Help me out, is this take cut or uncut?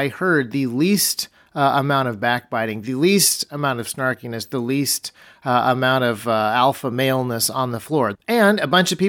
cut